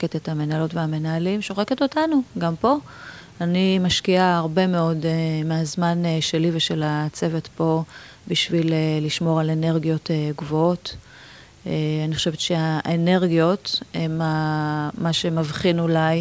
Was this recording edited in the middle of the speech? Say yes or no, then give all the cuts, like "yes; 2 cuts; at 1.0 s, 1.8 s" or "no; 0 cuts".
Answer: no; 0 cuts